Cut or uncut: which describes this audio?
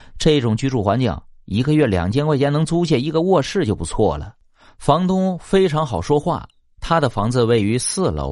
uncut